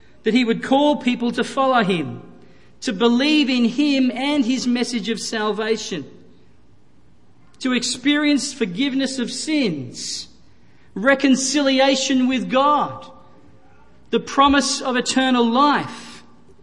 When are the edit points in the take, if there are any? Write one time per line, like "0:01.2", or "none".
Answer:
none